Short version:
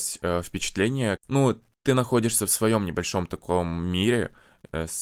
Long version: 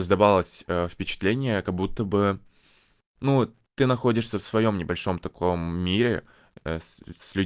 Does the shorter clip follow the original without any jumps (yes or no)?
no